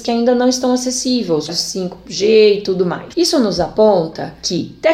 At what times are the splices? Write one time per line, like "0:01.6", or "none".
0:01.5
0:03.1